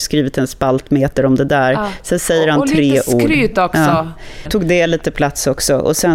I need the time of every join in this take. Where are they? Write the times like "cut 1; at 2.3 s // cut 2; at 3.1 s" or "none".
cut 1; at 4.5 s